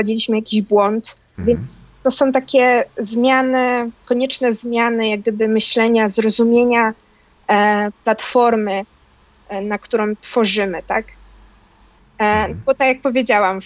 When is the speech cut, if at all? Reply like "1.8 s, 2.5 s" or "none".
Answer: 1.3 s, 12.0 s